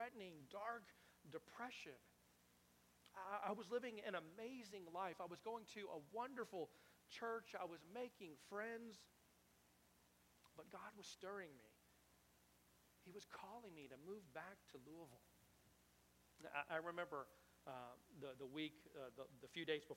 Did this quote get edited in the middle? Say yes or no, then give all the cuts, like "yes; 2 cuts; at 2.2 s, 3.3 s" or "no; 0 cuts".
no; 0 cuts